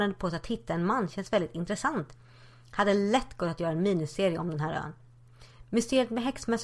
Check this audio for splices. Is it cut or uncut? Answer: uncut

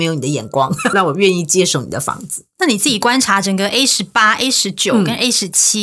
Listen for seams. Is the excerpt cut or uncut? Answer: cut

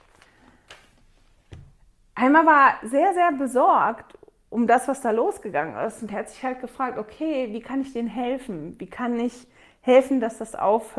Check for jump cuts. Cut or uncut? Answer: uncut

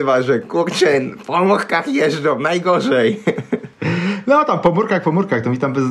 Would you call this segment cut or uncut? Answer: uncut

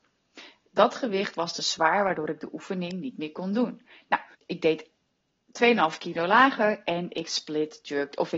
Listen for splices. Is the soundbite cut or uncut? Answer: cut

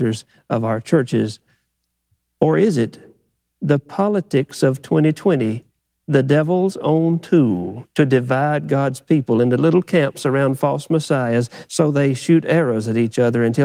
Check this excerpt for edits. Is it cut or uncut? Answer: uncut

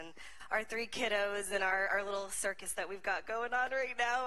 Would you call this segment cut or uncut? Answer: uncut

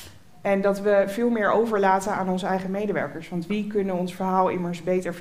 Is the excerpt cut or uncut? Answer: uncut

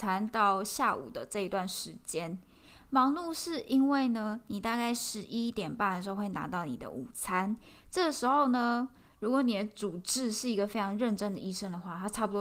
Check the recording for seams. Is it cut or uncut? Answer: uncut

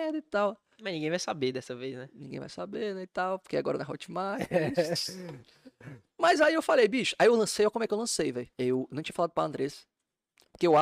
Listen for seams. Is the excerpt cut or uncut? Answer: cut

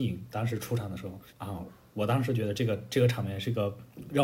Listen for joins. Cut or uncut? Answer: cut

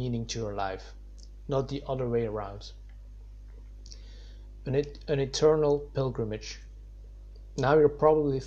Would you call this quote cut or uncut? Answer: uncut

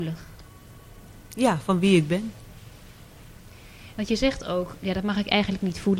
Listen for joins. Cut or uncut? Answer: cut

